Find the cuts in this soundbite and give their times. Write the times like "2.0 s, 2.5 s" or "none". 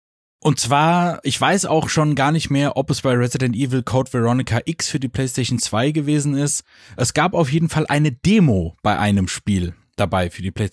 none